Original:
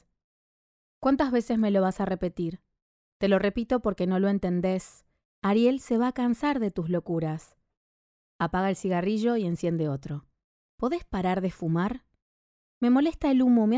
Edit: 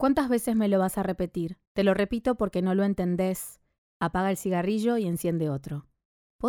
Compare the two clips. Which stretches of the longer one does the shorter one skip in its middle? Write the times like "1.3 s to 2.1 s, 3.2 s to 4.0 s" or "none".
2.7 s to 3.1 s, 5.2 s to 8.2 s